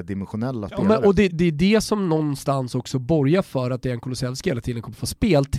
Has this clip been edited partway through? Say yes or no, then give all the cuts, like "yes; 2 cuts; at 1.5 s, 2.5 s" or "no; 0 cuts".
yes; 1 cut; at 1.3 s